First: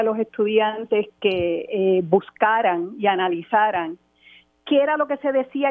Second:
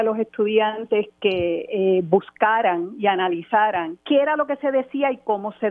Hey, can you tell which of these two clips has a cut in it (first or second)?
second